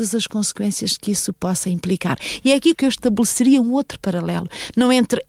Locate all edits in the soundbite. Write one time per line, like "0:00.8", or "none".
0:02.7